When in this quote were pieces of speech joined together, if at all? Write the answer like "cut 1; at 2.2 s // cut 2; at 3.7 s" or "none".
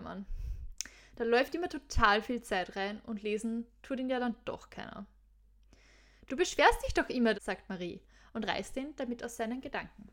cut 1; at 6.3 s // cut 2; at 7.3 s